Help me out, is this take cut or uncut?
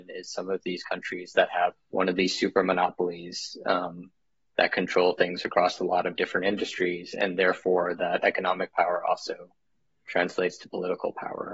cut